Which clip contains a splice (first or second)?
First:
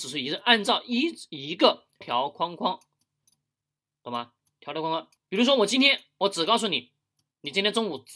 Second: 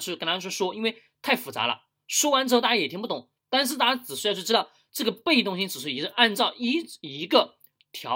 first